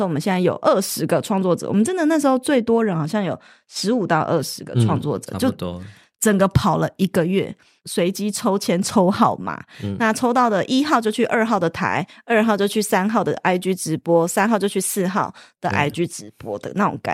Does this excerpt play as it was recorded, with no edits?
yes; 0 cuts

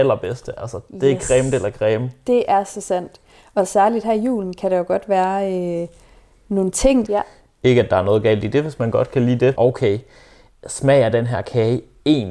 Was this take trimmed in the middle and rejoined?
yes; 2 cuts; at 7.0 s, 9.5 s

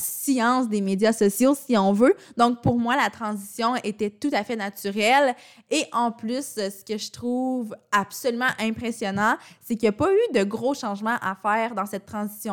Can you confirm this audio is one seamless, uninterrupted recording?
yes; 0 cuts

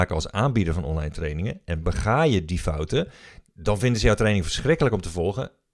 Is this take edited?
no; 0 cuts

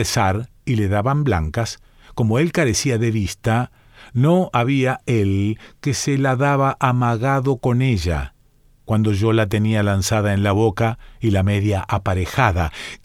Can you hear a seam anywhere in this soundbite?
no; 0 cuts

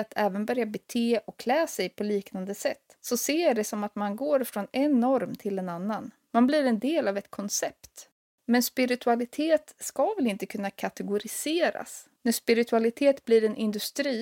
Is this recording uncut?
no; 1 cut; at 12.2 s

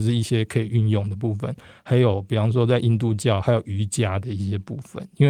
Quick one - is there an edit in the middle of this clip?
no; 0 cuts

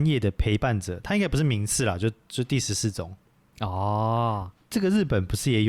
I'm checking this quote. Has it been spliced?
no; 0 cuts

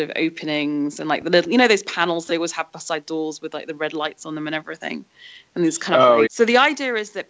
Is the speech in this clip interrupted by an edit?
yes; 1 cut; at 6.3 s

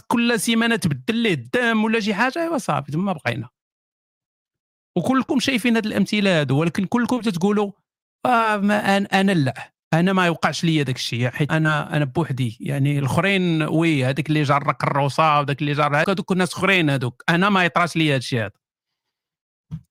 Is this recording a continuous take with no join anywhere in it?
no; 2 cuts; at 11.5 s, 16.0 s

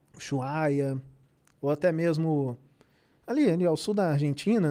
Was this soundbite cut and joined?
no; 0 cuts

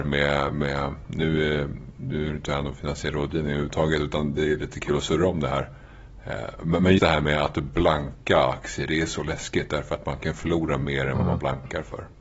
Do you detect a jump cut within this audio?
yes; 1 cut; at 7.0 s

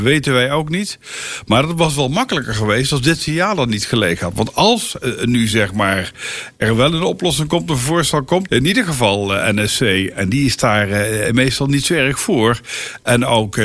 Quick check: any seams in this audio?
yes; 1 cut; at 8.5 s

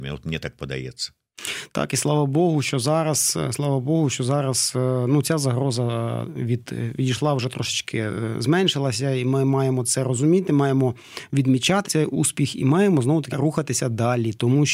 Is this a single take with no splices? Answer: no; 2 cuts; at 11.8 s, 13.3 s

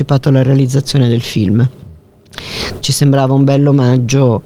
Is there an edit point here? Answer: yes; 1 cut; at 2.8 s

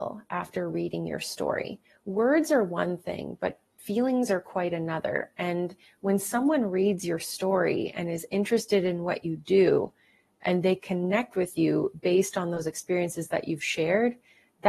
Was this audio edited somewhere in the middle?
no; 0 cuts

